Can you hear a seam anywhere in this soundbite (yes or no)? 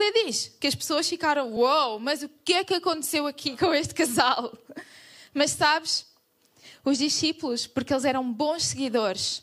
no